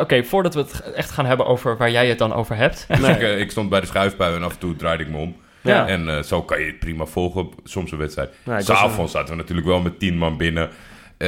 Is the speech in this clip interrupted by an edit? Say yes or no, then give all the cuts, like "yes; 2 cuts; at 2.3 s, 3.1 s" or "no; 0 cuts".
yes; 1 cut; at 2.9 s